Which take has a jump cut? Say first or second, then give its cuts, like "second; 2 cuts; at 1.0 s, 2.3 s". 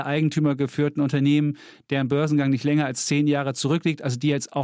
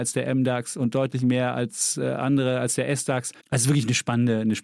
second; 1 cut; at 3.4 s